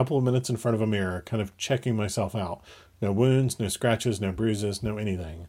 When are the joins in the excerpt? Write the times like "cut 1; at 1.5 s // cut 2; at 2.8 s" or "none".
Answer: none